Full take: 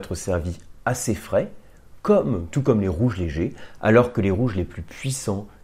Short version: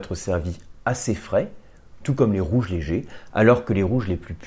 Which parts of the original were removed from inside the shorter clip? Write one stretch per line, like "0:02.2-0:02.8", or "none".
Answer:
0:02.0-0:02.5